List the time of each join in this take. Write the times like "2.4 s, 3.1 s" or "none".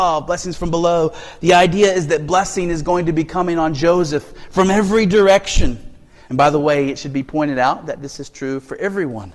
6.3 s